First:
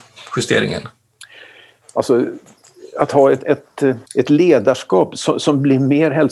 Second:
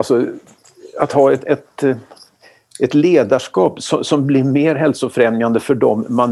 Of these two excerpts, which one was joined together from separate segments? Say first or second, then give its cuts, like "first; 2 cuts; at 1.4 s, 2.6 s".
first; 1 cut; at 4.1 s